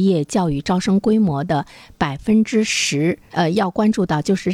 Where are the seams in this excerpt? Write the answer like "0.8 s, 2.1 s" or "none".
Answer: 3.3 s